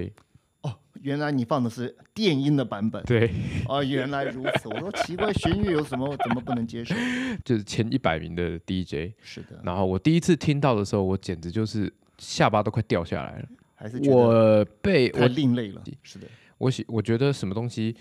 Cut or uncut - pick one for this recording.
cut